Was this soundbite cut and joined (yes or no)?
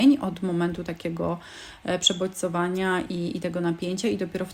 no